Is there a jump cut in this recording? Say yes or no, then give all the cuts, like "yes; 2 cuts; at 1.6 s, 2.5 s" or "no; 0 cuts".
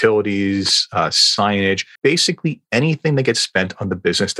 yes; 1 cut; at 2.0 s